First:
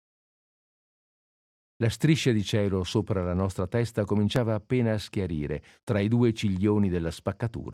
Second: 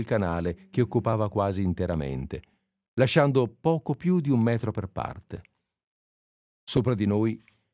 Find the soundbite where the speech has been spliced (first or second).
first